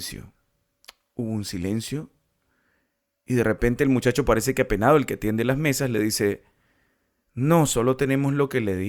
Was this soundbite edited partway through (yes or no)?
no